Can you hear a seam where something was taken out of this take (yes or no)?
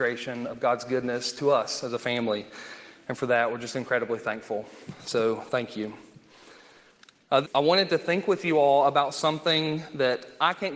yes